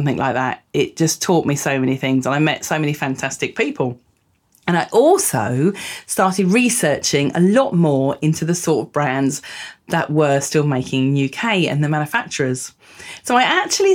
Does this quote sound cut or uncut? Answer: uncut